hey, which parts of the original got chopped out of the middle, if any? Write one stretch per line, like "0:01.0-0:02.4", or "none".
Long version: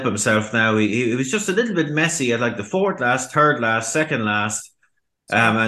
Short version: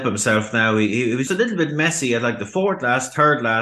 0:01.3-0:01.4